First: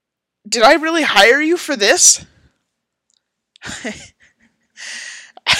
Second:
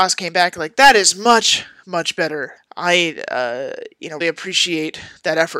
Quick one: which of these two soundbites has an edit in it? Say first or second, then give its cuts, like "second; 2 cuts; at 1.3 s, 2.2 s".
second; 2 cuts; at 2.6 s, 4.2 s